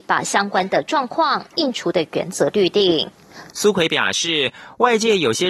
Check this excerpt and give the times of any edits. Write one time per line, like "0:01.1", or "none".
0:03.5